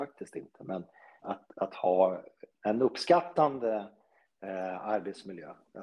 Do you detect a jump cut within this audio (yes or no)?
yes